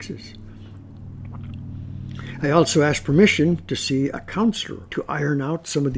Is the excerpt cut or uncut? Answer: cut